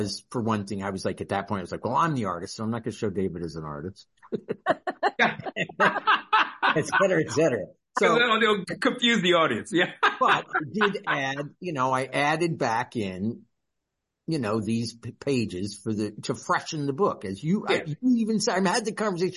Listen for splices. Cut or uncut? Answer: uncut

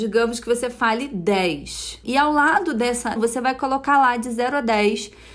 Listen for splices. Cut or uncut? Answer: cut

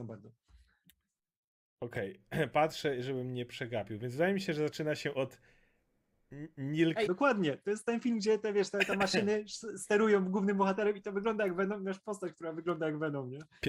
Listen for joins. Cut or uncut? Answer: cut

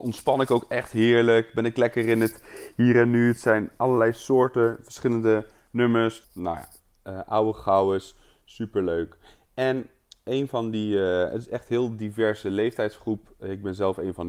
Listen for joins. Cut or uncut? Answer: cut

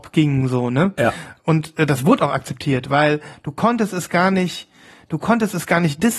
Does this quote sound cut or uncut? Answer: uncut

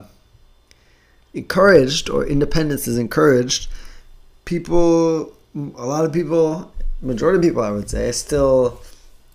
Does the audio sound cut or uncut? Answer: uncut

